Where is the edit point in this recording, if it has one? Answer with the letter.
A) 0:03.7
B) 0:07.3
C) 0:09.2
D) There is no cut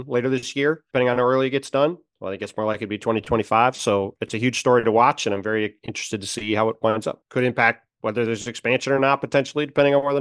B